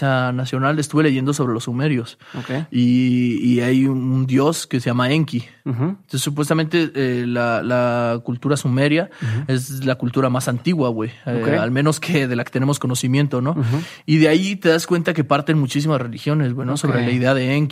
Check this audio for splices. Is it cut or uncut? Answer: uncut